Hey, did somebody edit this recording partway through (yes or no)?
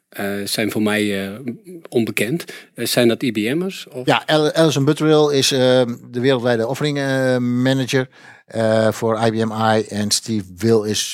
no